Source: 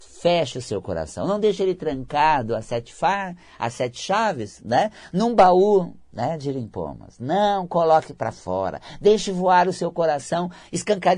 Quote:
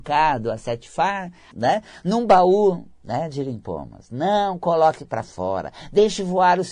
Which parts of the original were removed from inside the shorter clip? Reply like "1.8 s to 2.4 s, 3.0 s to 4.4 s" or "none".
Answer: 3.6 s to 4.6 s